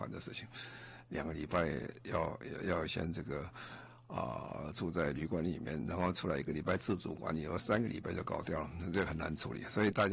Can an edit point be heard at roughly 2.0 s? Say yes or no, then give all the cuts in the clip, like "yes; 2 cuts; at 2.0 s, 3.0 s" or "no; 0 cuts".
no; 0 cuts